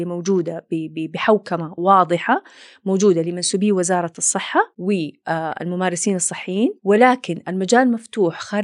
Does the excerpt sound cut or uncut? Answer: cut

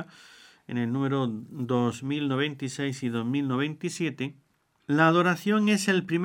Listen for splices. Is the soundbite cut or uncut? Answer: cut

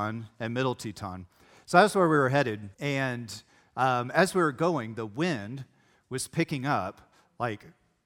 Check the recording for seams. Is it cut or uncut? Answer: cut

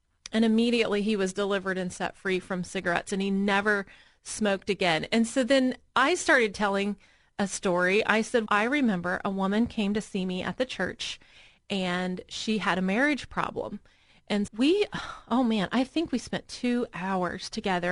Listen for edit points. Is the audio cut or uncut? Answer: cut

